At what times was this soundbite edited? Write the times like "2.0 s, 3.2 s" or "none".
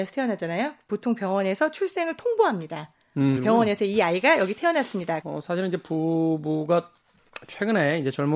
3.4 s, 5.2 s